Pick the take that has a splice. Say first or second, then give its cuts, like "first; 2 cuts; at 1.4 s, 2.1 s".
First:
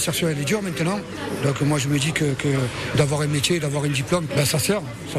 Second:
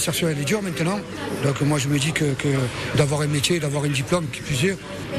first; 1 cut; at 4.3 s